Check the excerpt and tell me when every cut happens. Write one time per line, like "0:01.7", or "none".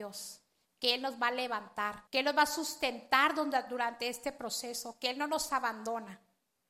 0:02.1